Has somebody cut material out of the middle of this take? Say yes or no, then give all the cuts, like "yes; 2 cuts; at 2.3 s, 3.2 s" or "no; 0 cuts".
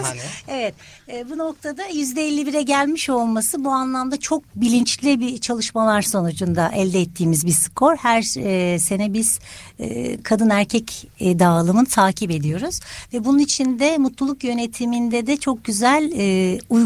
no; 0 cuts